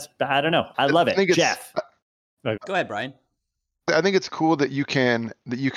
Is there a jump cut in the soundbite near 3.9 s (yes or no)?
yes